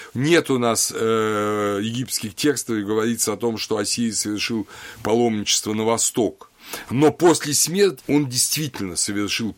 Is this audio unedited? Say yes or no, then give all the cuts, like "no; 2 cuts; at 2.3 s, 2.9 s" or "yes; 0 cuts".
no; 1 cut; at 8.0 s